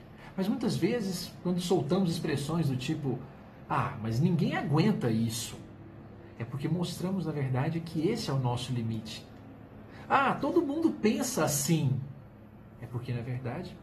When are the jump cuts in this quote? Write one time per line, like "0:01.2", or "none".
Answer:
none